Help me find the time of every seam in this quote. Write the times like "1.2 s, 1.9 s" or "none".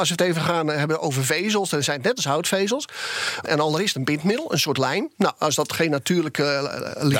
3.4 s